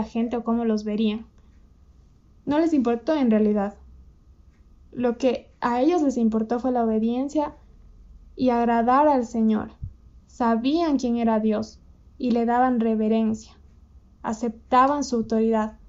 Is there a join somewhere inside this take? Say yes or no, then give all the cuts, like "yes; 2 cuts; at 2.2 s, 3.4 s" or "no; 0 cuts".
yes; 1 cut; at 10.2 s